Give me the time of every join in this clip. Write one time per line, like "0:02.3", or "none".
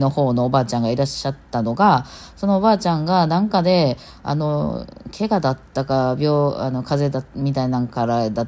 none